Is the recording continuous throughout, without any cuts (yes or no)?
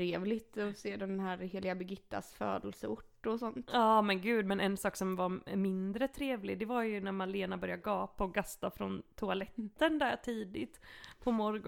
yes